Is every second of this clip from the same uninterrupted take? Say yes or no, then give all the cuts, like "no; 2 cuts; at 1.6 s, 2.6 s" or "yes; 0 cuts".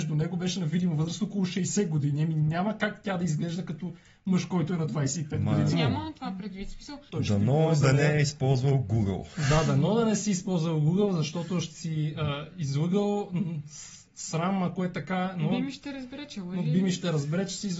no; 2 cuts; at 5.7 s, 7.1 s